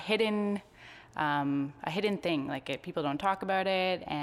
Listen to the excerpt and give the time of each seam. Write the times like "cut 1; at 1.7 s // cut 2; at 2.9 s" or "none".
none